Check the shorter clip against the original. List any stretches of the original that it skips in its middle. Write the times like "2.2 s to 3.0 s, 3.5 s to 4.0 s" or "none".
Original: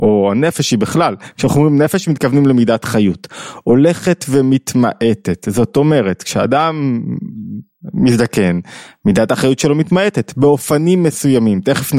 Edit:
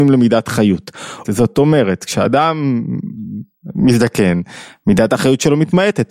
3.6 s to 5.4 s